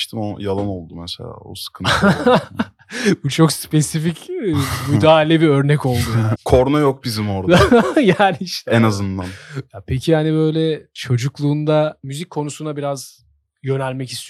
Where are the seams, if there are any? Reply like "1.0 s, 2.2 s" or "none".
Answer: 6.3 s

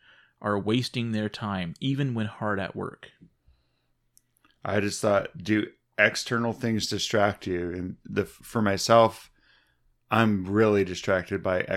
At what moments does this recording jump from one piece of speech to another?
8.4 s

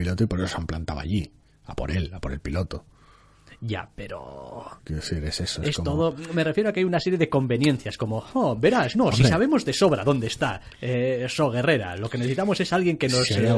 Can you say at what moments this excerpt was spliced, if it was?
4.8 s

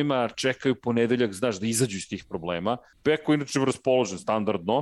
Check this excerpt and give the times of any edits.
2.9 s

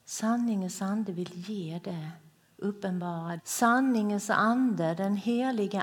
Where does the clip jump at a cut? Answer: 3.4 s

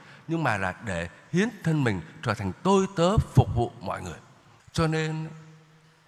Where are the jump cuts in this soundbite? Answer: 4.6 s

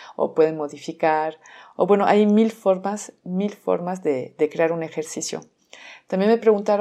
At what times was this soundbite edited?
none

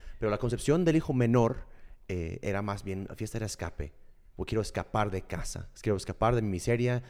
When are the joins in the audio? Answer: none

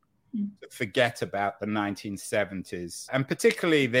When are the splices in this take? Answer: 3.1 s

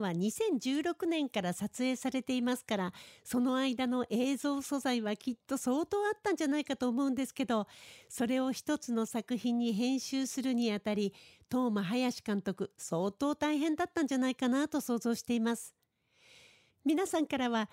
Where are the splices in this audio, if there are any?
16.7 s

